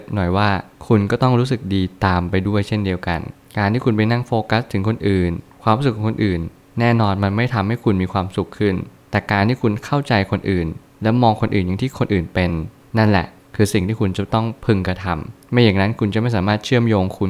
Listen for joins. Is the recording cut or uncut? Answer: uncut